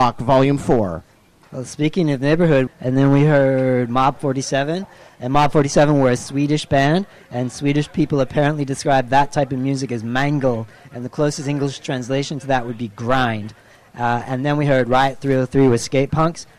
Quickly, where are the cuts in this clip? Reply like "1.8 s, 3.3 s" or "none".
2.7 s